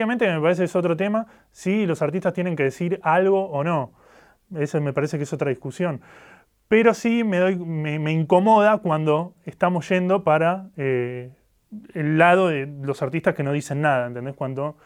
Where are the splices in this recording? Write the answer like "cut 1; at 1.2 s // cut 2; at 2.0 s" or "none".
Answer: none